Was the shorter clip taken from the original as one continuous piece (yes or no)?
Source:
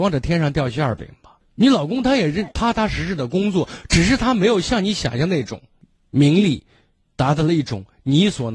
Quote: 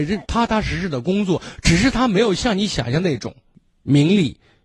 yes